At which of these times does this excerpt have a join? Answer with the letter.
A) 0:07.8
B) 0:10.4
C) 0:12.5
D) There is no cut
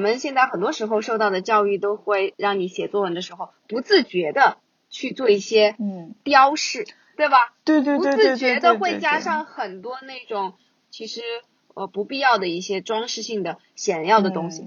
A